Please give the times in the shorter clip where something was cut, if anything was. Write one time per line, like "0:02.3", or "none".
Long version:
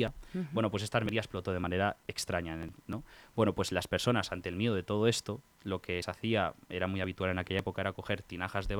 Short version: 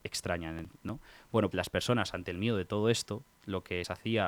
0:01.5